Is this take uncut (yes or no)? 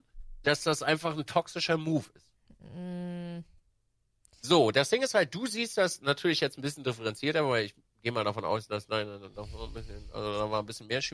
yes